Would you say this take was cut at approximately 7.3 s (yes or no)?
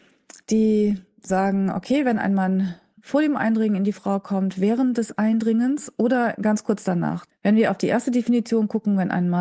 yes